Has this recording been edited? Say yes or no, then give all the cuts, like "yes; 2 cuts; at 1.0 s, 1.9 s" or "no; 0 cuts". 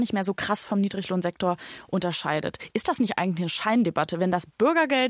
no; 0 cuts